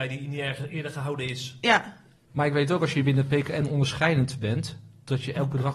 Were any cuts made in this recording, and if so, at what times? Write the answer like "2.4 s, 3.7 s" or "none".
2.3 s